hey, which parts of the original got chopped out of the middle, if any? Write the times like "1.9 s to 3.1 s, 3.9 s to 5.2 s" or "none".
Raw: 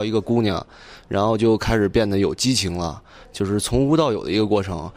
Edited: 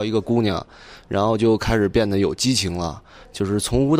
none